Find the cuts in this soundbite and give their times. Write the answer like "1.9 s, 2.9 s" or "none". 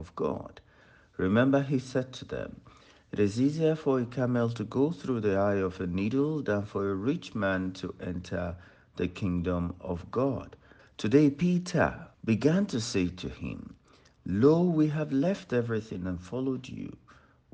10.8 s, 12.1 s